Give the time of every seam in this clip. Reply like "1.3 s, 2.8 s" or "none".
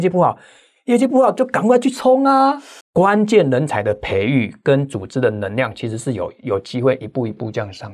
2.8 s